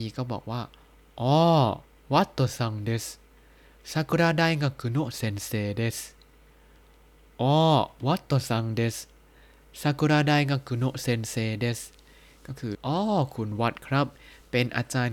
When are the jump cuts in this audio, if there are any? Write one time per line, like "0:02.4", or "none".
0:12.7